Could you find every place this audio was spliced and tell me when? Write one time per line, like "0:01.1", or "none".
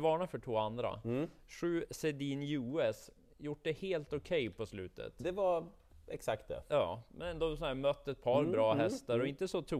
none